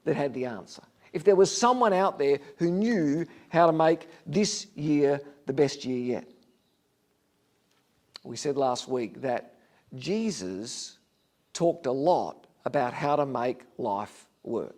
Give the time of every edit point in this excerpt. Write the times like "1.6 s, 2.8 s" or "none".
none